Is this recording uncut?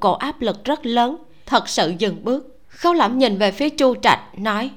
no; 1 cut; at 2.6 s

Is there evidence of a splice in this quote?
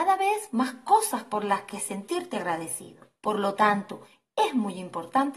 yes; 1 cut; at 3.2 s

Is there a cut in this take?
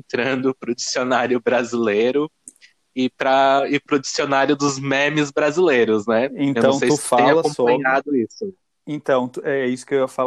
no; 0 cuts

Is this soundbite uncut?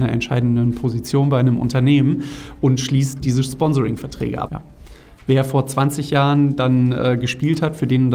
no; 1 cut; at 4.5 s

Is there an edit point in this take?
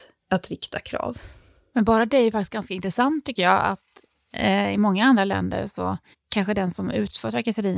no; 0 cuts

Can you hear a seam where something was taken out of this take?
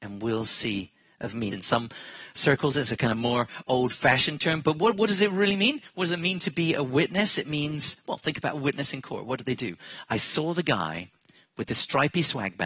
yes; 1 cut; at 1.5 s

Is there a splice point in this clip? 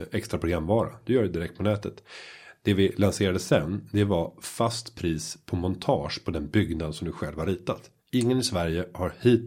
yes; 1 cut; at 8.0 s

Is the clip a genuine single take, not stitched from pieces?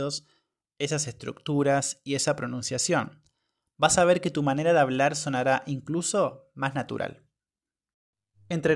yes; 0 cuts

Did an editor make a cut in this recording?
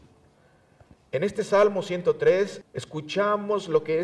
yes; 1 cut; at 2.6 s

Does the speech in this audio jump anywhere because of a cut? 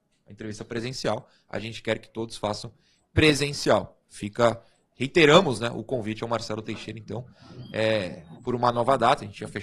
no; 0 cuts

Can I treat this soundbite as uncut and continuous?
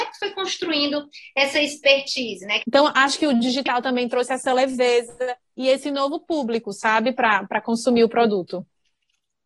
no; 1 cut; at 2.6 s

